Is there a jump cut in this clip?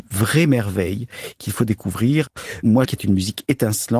yes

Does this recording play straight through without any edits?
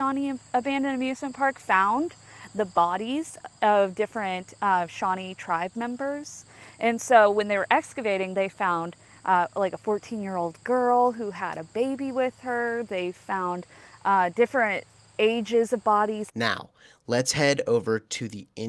no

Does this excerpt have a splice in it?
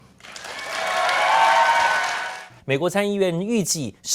yes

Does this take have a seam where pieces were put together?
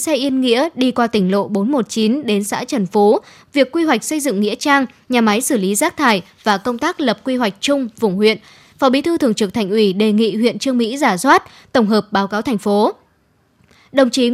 no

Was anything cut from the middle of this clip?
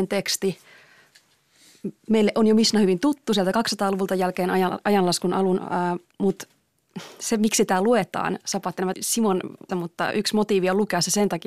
yes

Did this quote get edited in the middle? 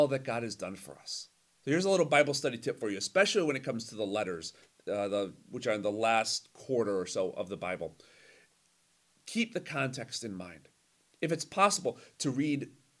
no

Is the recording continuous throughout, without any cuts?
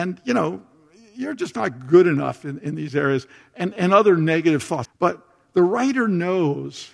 no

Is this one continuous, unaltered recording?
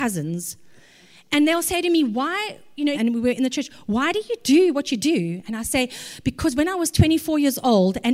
no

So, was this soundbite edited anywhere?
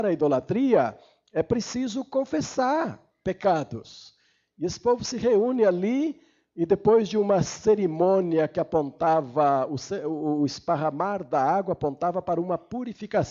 no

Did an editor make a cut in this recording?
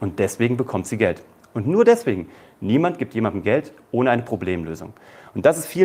no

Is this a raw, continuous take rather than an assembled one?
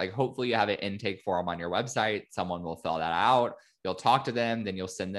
yes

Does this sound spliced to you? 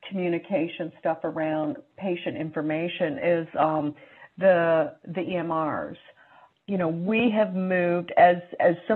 no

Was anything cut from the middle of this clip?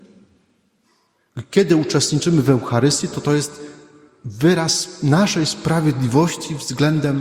no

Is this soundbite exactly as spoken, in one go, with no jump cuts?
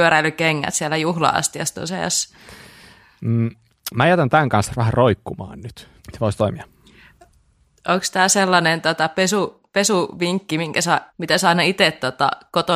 no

